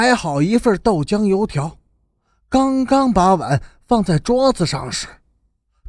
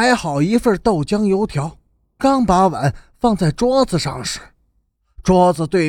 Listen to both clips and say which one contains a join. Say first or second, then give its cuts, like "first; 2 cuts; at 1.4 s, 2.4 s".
second; 1 cut; at 2.2 s